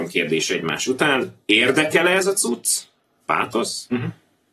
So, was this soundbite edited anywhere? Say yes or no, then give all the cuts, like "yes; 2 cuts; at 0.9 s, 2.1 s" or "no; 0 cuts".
no; 0 cuts